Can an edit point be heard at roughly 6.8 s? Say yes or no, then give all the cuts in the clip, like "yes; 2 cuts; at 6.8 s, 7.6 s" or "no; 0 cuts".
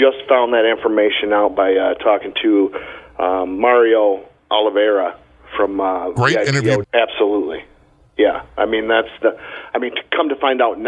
yes; 1 cut; at 6.8 s